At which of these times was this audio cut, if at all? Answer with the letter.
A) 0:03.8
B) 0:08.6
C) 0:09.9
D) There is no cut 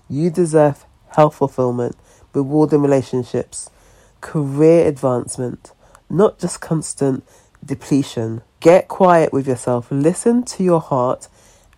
B